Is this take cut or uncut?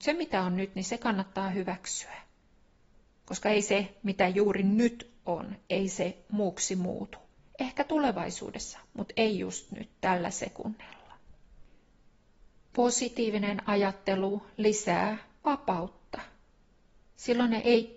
uncut